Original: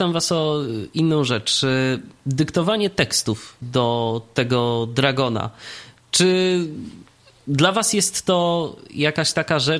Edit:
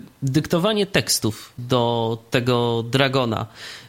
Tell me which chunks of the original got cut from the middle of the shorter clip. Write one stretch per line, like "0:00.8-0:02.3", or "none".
none